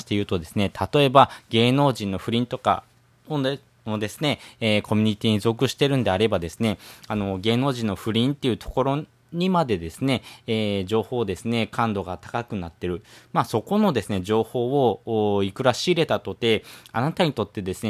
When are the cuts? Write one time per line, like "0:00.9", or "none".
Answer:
none

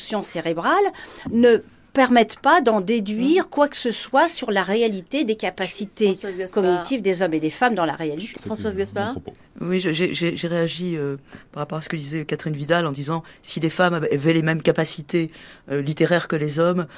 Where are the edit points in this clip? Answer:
0:08.4

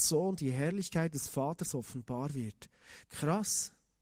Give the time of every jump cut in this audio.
0:03.0

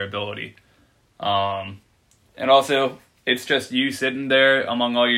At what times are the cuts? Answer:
none

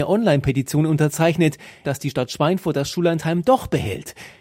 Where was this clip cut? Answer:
0:01.8

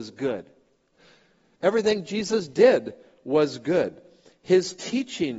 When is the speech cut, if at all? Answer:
0:00.9

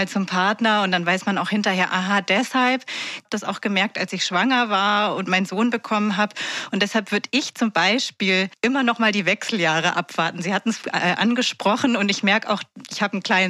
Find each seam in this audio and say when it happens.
none

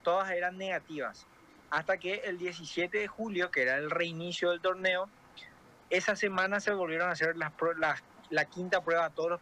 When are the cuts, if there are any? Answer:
none

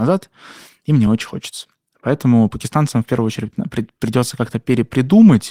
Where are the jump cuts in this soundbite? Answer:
none

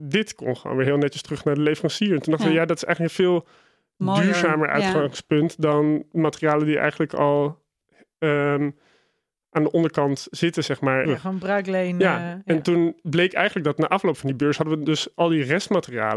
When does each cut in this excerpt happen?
0:11.0

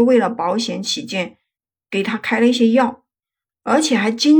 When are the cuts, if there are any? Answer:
0:03.5

